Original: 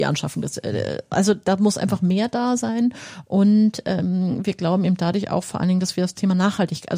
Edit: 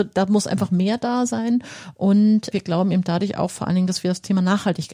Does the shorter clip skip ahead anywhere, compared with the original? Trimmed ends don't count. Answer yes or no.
yes